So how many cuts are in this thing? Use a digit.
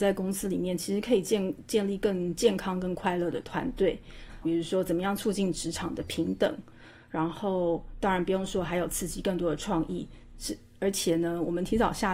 1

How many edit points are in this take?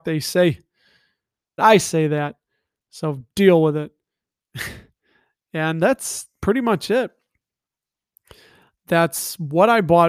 1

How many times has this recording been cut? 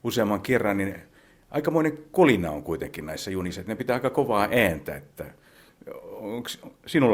0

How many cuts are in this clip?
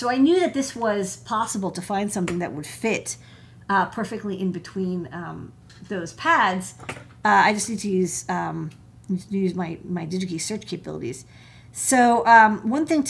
0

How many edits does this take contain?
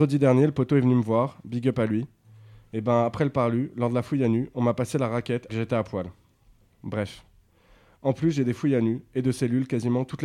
1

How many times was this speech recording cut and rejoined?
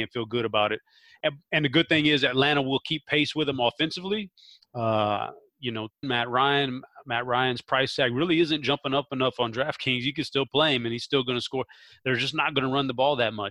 1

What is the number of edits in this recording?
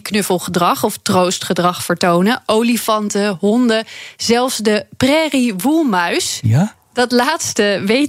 0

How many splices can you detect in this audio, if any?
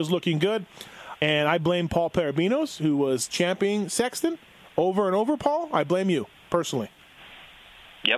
1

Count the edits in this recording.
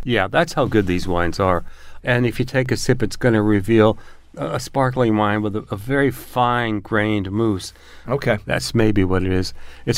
2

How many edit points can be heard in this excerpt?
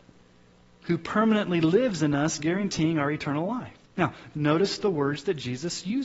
1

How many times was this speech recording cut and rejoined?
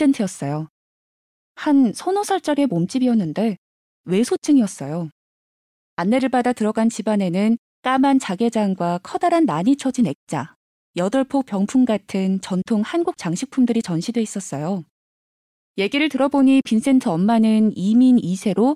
1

